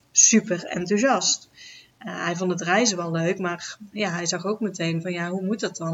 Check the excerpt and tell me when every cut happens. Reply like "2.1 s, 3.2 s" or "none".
none